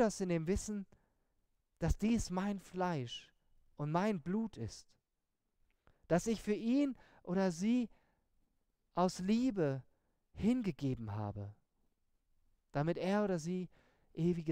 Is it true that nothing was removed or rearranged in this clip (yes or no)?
yes